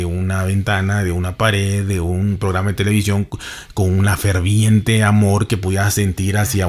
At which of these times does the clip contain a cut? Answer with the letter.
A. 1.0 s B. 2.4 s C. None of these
C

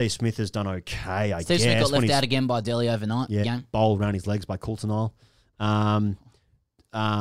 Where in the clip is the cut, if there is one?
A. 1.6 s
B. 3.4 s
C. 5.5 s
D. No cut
B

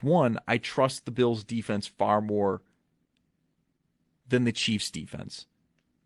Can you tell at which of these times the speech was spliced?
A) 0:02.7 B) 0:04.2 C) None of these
C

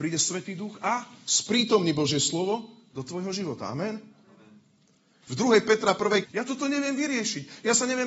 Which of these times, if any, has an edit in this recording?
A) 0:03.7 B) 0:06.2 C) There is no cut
B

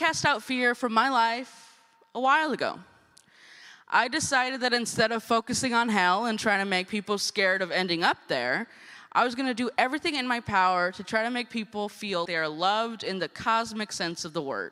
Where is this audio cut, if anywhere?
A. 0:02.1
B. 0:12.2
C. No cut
B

